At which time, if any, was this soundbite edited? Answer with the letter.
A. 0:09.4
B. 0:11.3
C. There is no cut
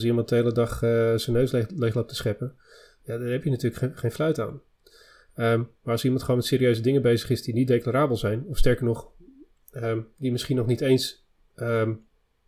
C